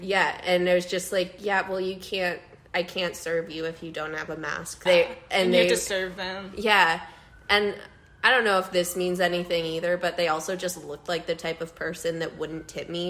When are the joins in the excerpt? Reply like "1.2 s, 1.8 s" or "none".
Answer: 4.9 s